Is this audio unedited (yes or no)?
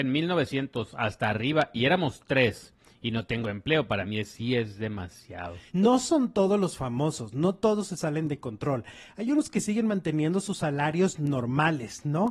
no